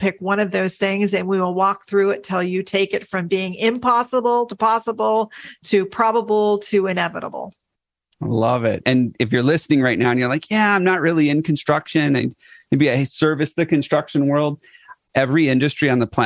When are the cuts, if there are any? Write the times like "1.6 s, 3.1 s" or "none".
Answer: none